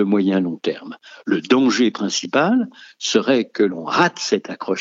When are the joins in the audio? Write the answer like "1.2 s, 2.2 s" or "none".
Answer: none